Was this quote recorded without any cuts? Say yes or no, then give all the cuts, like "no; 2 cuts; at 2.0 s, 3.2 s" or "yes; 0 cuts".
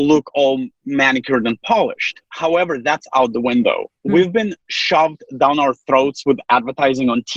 yes; 0 cuts